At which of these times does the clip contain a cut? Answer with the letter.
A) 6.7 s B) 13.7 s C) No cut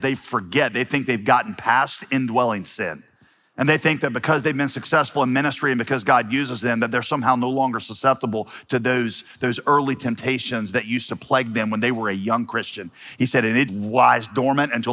B